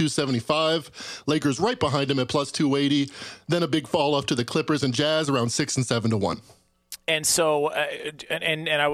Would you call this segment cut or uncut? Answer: uncut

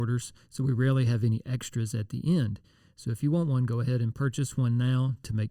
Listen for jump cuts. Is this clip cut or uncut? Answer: uncut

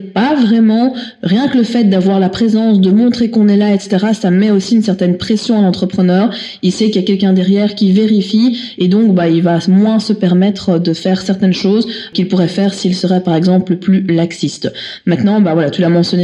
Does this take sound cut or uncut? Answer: uncut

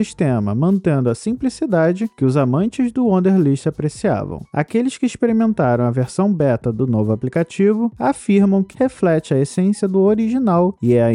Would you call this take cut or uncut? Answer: cut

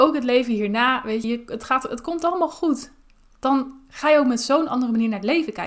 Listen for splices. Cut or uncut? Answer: cut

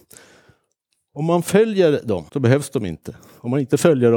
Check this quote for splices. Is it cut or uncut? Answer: cut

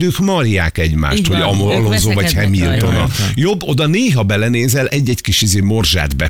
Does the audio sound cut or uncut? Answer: uncut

